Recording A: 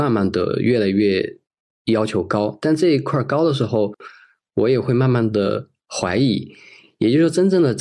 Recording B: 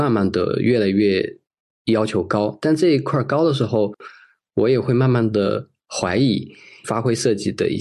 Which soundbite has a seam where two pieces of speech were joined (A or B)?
B